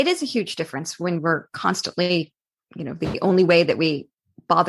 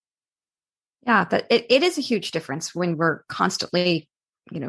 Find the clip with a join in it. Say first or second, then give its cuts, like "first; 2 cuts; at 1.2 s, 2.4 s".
second; 1 cut; at 1.7 s